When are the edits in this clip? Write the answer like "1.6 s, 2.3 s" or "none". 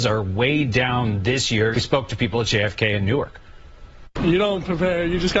1.7 s